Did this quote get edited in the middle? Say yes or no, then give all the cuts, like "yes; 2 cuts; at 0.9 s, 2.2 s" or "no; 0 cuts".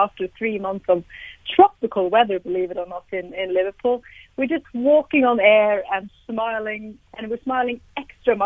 yes; 1 cut; at 7.1 s